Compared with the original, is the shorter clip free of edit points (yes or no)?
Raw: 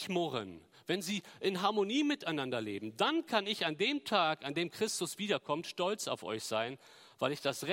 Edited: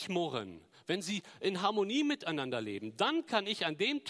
yes